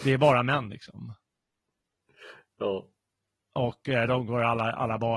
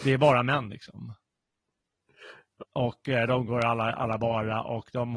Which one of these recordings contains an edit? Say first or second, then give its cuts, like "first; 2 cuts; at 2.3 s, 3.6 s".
second; 1 cut; at 2.6 s